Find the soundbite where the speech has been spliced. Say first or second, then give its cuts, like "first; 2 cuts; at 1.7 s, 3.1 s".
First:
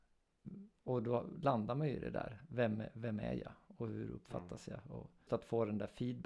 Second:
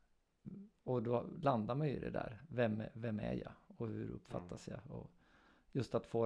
first; 1 cut; at 5.3 s